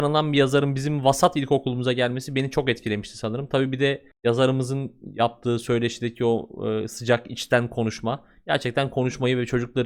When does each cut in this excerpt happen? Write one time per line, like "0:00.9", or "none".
0:04.1